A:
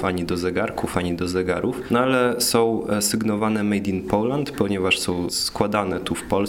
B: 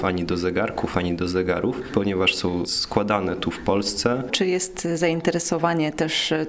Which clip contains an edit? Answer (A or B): B